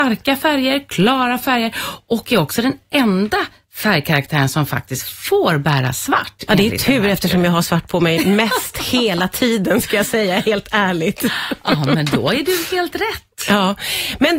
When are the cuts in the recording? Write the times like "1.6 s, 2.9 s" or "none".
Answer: none